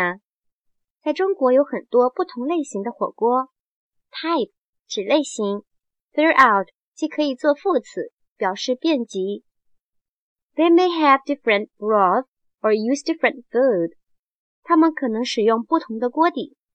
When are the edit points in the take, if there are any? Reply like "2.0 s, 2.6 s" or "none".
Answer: 8.3 s